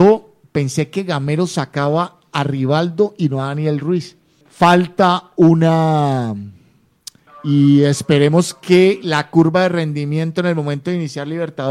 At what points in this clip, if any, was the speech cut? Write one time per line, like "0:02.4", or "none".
0:04.4
0:07.3